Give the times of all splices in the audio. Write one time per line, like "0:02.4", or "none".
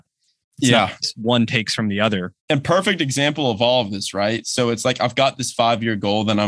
0:02.4